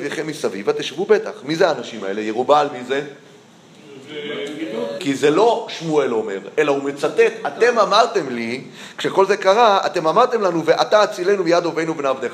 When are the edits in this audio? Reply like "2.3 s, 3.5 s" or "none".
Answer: 5.0 s